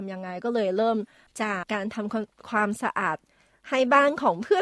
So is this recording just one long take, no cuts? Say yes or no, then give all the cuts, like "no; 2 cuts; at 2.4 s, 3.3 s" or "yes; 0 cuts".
no; 1 cut; at 1.6 s